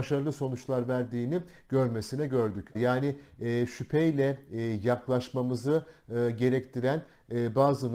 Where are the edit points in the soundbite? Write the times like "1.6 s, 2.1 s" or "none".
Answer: 2.7 s